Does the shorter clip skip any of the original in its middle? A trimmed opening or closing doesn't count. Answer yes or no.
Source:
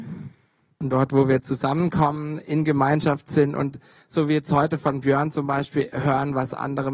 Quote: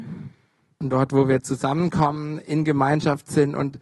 no